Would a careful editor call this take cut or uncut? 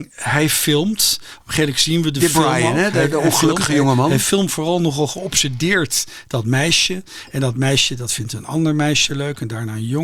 uncut